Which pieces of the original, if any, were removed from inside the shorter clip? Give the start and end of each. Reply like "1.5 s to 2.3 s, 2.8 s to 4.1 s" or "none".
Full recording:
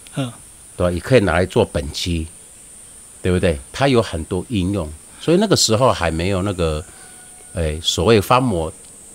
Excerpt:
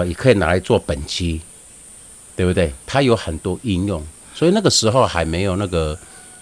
none